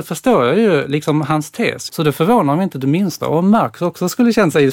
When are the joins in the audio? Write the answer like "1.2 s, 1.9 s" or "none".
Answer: 1.9 s